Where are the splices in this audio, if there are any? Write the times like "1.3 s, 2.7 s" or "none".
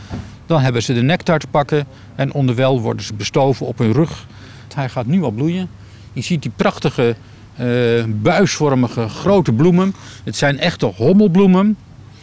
4.7 s